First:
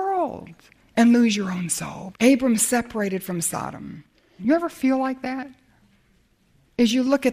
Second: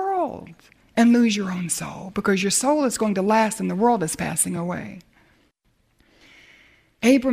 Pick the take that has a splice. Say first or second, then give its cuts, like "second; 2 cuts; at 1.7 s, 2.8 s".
first; 2 cuts; at 2.1 s, 4.4 s